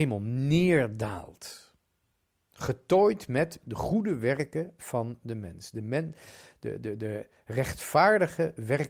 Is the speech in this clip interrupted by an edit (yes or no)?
no